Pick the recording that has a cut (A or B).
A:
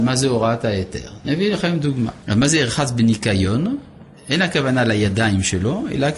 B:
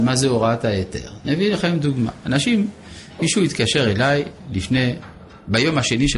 A